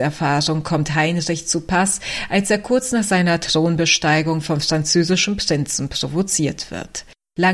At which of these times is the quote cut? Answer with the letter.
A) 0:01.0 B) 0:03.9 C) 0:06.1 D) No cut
D